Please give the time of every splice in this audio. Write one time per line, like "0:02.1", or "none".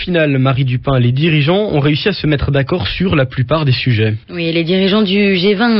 0:04.2